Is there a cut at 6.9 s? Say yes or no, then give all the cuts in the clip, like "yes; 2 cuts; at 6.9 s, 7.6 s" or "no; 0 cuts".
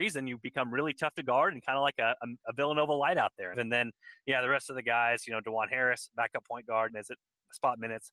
yes; 2 cuts; at 3.5 s, 6.9 s